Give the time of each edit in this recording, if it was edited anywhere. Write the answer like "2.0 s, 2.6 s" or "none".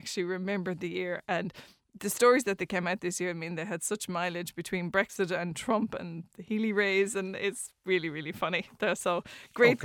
none

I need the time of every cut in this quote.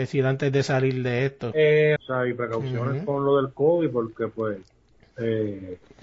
2.0 s

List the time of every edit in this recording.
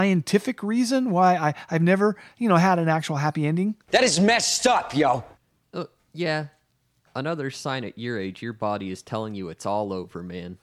3.8 s

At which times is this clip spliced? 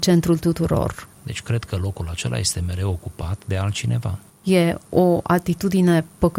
1.2 s, 4.3 s

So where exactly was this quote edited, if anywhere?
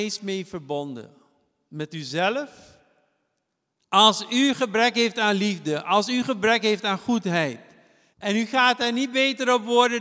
3.8 s, 8.1 s

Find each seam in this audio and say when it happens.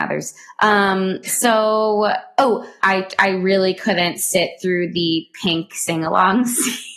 2.8 s

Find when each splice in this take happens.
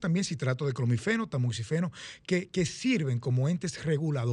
none

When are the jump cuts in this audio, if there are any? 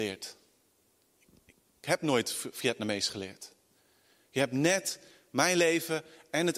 none

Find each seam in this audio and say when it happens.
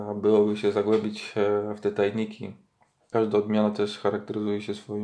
3.1 s

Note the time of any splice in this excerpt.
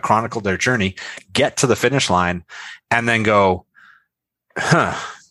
none

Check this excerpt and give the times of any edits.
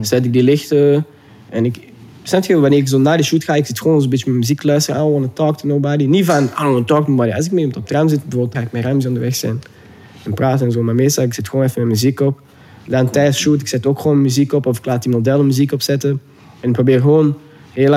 8.5 s

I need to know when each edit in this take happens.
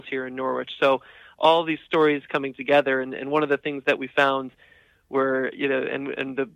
none

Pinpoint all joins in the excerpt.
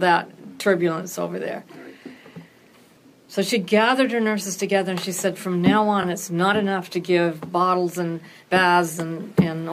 none

